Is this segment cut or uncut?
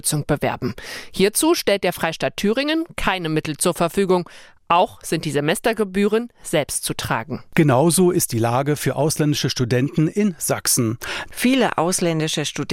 cut